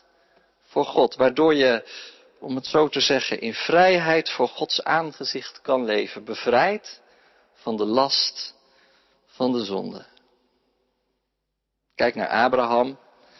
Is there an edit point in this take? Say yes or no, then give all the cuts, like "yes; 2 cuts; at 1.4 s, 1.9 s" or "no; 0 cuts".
no; 0 cuts